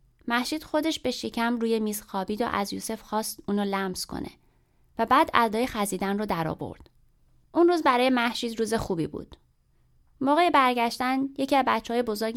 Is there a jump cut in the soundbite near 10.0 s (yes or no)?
yes